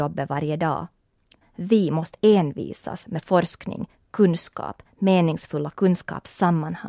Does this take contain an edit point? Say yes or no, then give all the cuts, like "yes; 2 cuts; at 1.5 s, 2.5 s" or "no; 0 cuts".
yes; 1 cut; at 1.4 s